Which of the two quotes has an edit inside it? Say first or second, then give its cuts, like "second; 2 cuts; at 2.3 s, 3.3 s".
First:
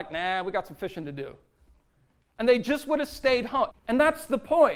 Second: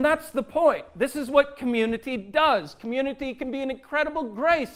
first; 1 cut; at 3.7 s